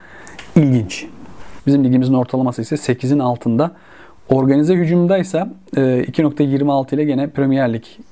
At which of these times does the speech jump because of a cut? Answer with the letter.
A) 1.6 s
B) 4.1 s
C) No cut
A